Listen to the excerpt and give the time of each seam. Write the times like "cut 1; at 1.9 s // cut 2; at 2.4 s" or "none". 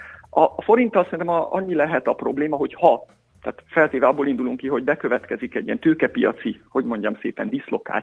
cut 1; at 5.6 s